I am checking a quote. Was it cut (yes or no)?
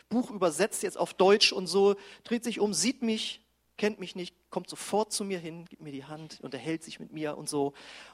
no